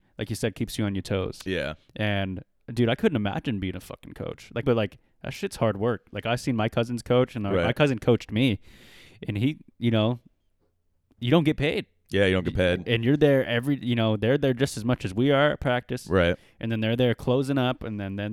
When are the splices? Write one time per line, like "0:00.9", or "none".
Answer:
0:04.6

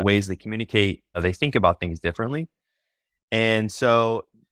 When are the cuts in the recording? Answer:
0:01.1

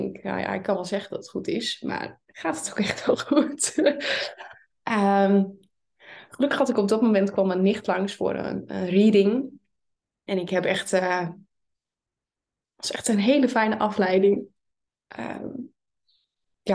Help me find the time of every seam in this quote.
none

